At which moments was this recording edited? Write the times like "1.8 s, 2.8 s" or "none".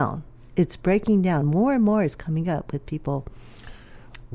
none